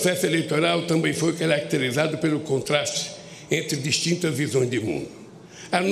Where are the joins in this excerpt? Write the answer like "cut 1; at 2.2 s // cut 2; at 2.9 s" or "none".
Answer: none